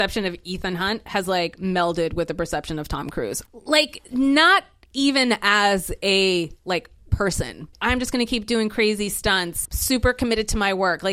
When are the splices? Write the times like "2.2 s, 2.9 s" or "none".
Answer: 3.5 s, 7.7 s, 9.6 s